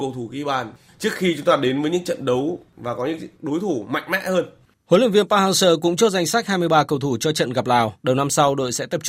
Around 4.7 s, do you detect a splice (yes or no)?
no